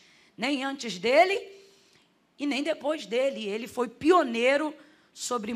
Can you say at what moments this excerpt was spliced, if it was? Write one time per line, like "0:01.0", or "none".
none